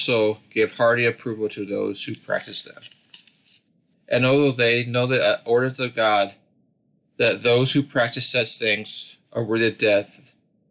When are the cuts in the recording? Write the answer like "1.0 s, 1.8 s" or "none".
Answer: 3.9 s, 9.2 s